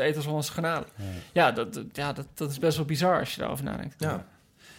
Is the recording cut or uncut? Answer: uncut